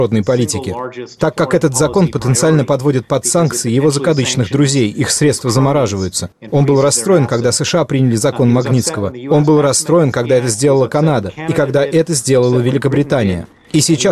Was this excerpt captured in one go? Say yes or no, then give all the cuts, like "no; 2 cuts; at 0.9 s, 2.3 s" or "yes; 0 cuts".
yes; 0 cuts